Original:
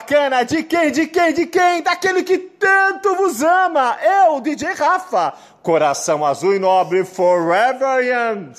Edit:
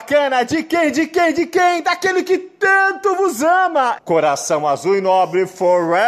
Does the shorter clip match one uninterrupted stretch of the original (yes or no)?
no